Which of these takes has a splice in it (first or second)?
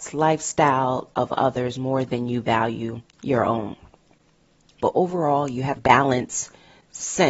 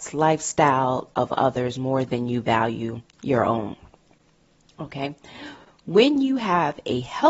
first